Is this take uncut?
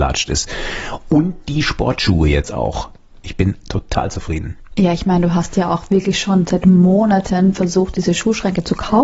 no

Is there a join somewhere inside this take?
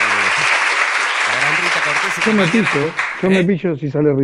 no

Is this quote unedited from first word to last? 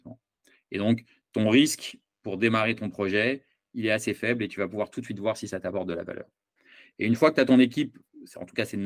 yes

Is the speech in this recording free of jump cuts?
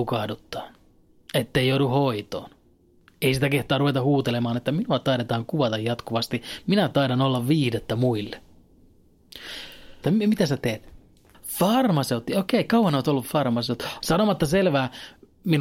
no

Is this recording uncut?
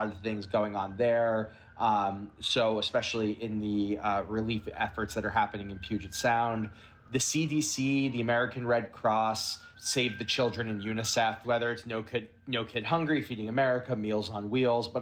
no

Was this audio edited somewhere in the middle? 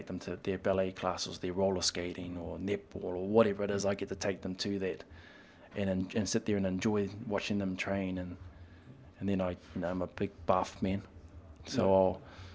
no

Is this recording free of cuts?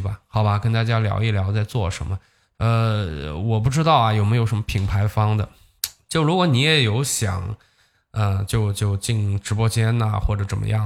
no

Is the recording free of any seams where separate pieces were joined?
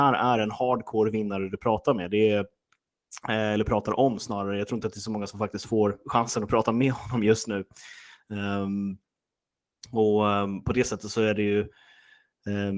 yes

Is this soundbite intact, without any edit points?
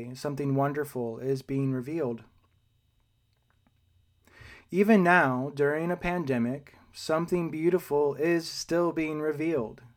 yes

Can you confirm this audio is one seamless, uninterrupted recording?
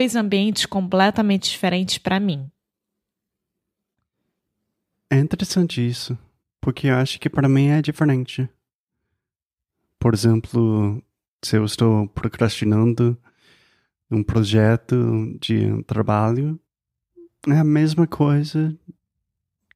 yes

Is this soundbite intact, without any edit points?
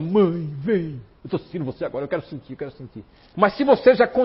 no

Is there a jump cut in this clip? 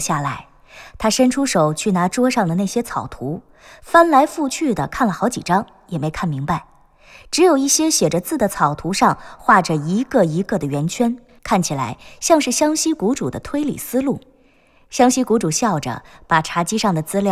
yes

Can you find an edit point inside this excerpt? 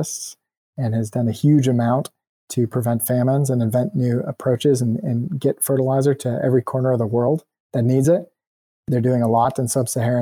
no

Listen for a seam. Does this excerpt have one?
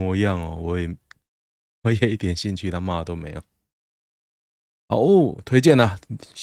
no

